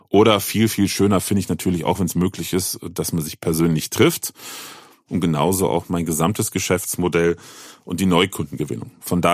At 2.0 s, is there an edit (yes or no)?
no